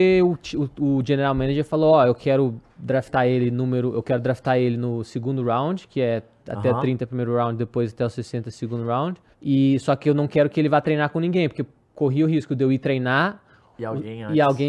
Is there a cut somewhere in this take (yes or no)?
yes